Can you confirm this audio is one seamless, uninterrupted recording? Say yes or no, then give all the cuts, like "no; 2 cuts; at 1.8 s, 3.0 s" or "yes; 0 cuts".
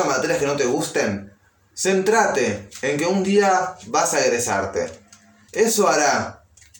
yes; 0 cuts